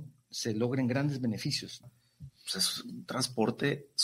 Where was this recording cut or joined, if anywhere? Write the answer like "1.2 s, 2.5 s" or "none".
1.8 s